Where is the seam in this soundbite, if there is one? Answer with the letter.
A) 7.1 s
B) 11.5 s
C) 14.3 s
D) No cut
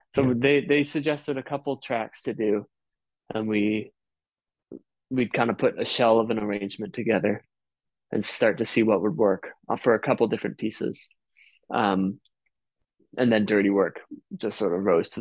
D